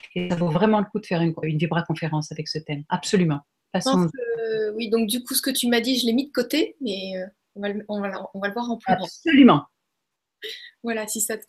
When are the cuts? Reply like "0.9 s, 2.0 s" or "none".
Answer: 1.4 s